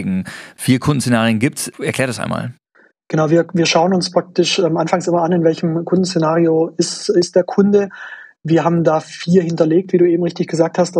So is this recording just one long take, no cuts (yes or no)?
yes